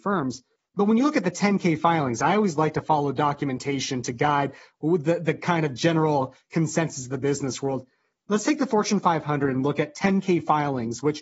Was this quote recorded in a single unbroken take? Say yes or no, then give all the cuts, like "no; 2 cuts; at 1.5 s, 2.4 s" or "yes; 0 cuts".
yes; 0 cuts